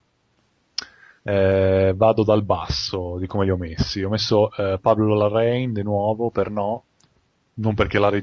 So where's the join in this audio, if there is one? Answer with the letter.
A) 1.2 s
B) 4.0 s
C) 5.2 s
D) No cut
A